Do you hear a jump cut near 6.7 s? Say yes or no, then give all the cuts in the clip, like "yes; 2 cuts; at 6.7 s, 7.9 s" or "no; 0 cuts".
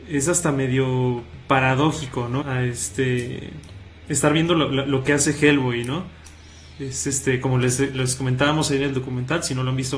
no; 1 cut; at 2.4 s